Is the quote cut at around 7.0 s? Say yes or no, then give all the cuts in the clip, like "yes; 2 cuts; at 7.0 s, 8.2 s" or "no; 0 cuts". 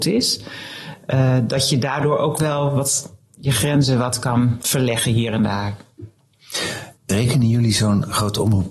yes; 1 cut; at 7.0 s